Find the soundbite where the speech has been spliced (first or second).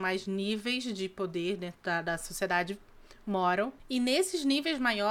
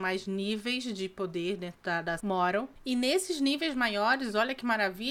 second